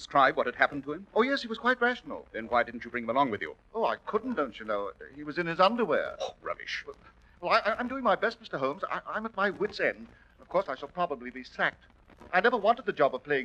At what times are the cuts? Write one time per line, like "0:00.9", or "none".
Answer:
0:10.7